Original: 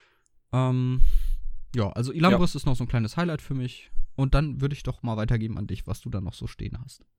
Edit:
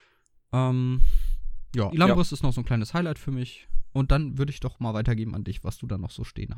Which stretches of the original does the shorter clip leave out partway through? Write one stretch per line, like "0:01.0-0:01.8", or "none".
0:01.9-0:02.1

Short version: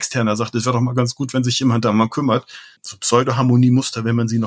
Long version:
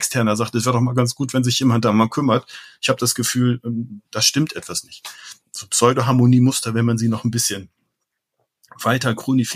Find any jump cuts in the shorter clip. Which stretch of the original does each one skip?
0:02.8-0:05.5

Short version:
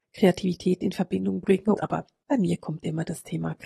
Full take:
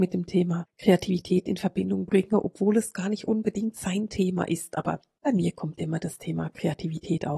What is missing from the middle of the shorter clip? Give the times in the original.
0:02.4-0:04.7

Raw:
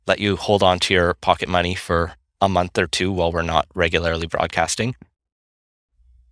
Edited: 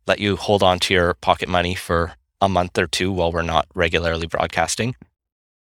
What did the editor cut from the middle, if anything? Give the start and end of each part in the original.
none

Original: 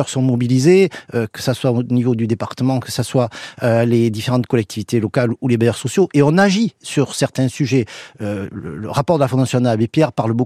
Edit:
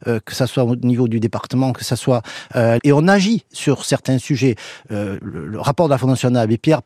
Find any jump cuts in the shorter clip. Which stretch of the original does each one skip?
0:03.9-0:06.1

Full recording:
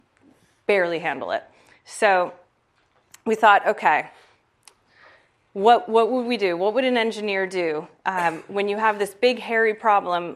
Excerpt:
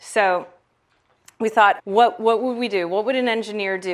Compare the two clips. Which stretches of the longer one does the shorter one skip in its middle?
0:03.6-0:05.5

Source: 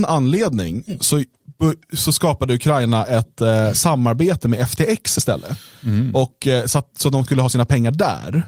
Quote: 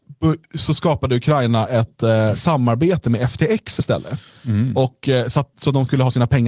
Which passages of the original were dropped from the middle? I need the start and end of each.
none

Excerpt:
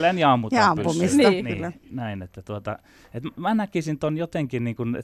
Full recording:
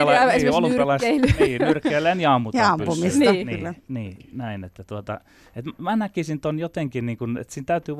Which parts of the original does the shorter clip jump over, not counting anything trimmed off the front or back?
0:03.9-0:04.2

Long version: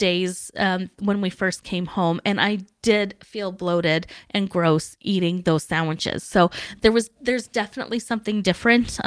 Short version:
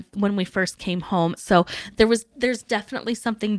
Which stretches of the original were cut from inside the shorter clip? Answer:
0:02.2-0:06.2

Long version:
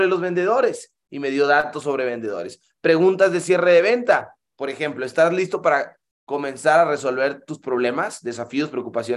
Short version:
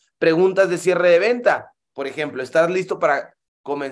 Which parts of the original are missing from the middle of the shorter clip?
none

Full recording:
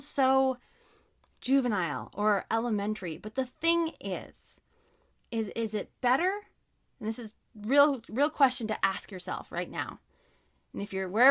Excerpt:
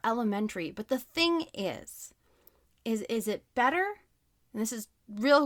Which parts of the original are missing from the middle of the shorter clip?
none

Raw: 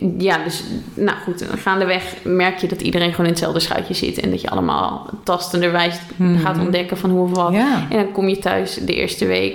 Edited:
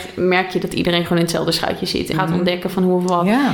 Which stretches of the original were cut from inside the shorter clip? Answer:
0:04.2-0:06.4

